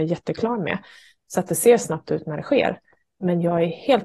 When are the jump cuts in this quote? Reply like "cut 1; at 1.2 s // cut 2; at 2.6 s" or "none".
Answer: none